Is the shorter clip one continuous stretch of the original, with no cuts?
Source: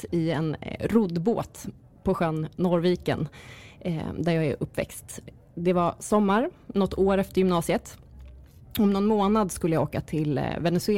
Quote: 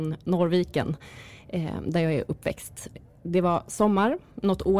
yes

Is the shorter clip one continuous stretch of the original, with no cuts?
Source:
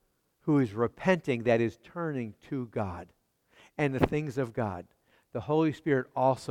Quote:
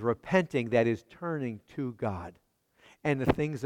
yes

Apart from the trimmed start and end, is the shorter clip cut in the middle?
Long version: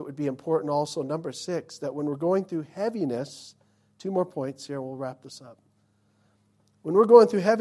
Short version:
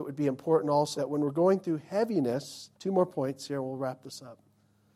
yes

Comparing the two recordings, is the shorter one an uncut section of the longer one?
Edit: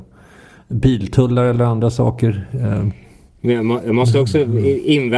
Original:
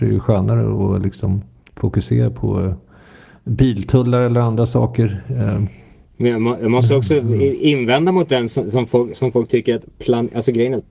yes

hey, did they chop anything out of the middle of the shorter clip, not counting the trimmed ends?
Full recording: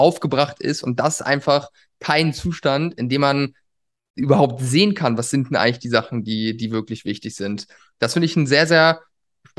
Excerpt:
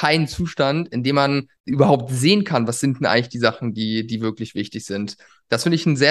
yes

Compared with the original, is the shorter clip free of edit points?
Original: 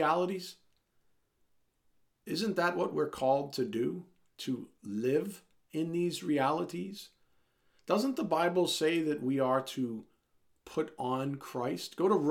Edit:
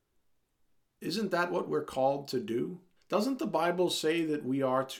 no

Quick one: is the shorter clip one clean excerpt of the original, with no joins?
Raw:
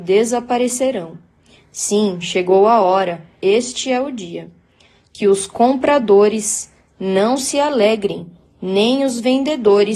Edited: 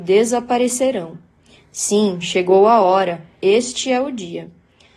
yes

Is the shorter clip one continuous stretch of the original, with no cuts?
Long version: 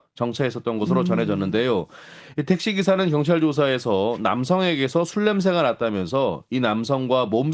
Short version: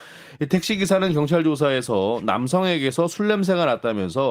yes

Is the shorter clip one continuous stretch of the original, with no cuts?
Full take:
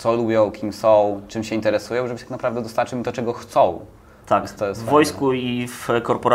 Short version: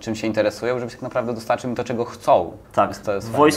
no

